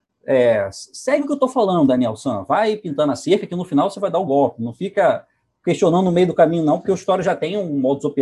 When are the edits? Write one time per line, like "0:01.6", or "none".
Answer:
none